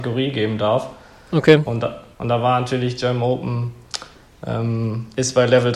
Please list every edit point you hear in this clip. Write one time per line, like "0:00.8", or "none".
none